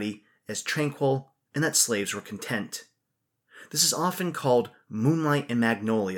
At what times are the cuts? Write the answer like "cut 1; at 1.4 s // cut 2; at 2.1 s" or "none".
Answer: cut 1; at 1.4 s